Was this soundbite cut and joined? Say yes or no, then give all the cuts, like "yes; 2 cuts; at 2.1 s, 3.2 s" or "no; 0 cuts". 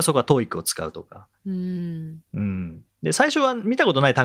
no; 0 cuts